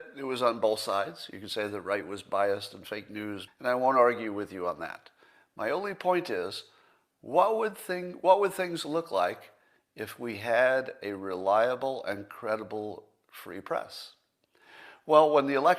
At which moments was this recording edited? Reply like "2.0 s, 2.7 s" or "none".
3.5 s